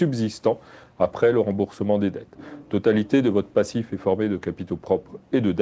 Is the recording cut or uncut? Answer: uncut